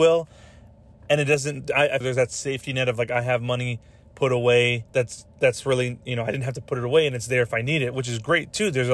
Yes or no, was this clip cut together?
yes